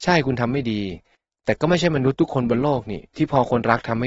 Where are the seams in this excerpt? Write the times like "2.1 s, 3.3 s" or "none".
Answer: none

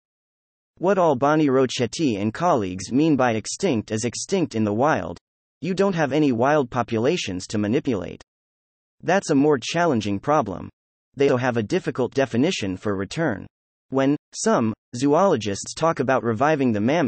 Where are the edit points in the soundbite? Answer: 11.3 s

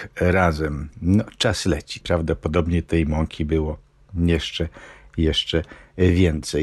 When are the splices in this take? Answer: 0.9 s, 2.0 s

